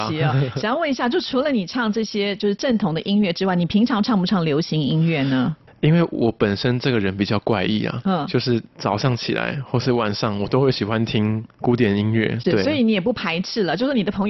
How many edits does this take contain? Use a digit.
1